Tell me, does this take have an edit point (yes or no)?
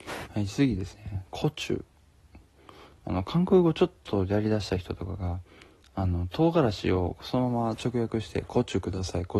no